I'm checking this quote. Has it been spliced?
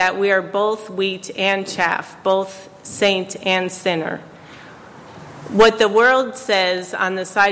no; 0 cuts

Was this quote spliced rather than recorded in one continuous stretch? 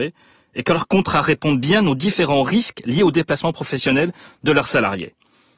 no; 0 cuts

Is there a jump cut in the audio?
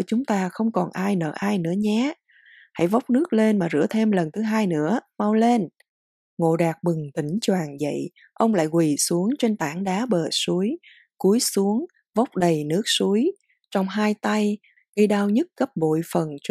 yes; 1 cut; at 14.8 s

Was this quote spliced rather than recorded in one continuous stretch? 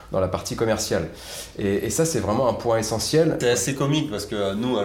yes; 1 cut; at 3.4 s

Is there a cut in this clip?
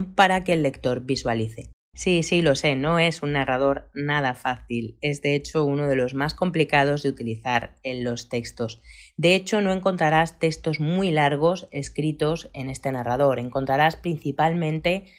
no; 0 cuts

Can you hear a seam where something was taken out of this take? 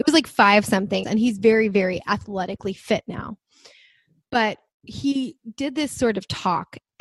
yes; 1 cut; at 1.0 s

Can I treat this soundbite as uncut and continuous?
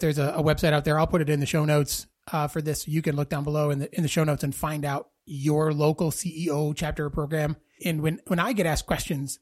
no; 1 cut; at 7.8 s

